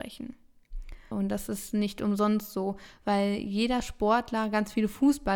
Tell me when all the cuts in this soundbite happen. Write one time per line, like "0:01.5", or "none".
0:01.1

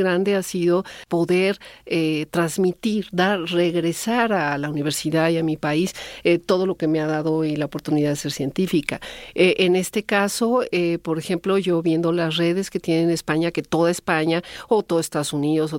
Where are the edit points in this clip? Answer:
none

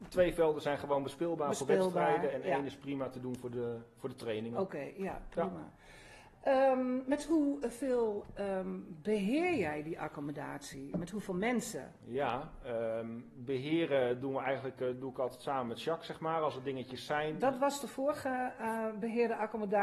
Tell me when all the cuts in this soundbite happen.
none

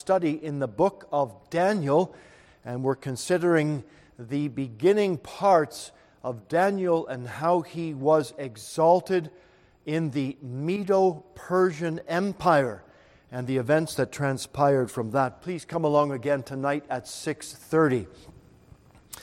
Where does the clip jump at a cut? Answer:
0:02.5

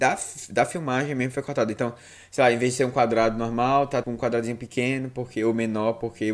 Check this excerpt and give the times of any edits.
0:04.0

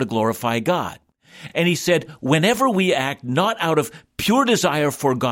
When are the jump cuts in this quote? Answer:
none

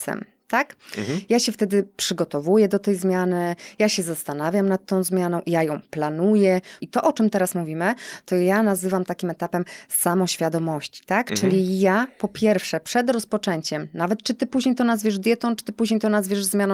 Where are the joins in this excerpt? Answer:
0:06.8

